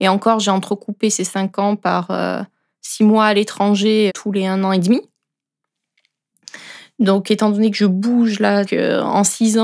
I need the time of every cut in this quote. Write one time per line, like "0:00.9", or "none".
0:04.1
0:08.7